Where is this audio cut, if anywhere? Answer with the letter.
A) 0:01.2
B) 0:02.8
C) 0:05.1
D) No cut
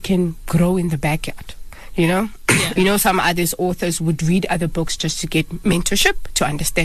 B